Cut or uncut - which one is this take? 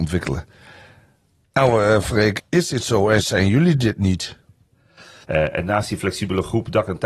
cut